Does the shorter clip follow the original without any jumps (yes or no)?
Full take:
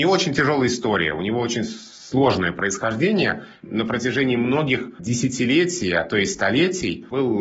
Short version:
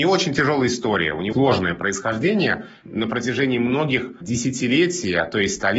no